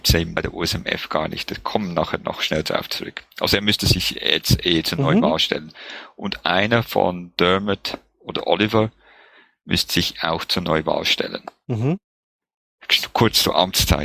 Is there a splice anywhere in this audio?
no; 0 cuts

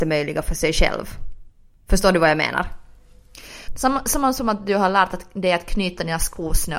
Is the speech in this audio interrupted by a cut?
yes; 1 cut; at 3.7 s

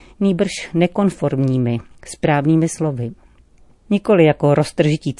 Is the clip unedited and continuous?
no; 1 cut; at 3.9 s

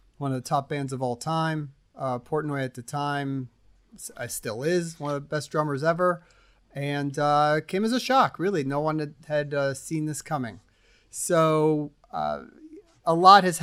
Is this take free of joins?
yes; 0 cuts

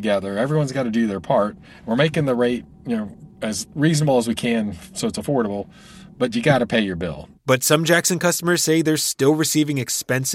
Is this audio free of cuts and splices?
yes; 0 cuts

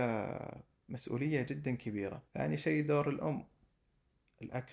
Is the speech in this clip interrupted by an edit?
yes; 1 cut; at 2.3 s

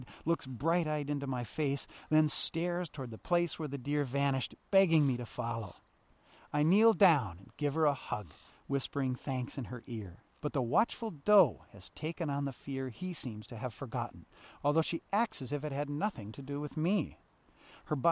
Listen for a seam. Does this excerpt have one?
yes; 1 cut; at 10.4 s

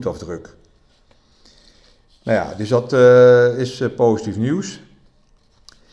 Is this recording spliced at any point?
no; 0 cuts

